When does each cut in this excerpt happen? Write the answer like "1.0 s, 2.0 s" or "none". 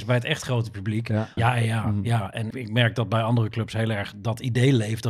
1.4 s, 2.5 s